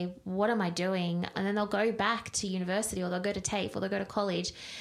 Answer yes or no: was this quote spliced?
yes